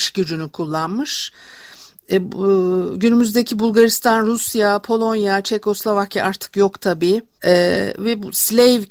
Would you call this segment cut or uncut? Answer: cut